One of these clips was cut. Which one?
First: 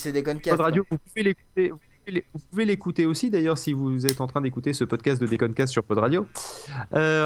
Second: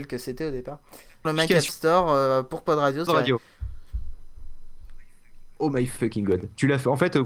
second; 2 cuts; at 1.2 s, 3.1 s

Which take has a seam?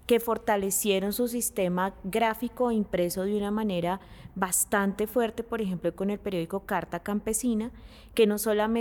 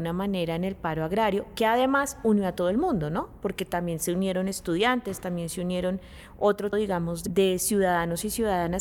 second; 1 cut; at 6.7 s

